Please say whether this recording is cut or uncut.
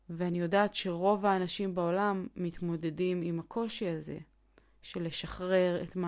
uncut